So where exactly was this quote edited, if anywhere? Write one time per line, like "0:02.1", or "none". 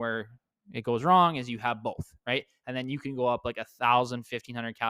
none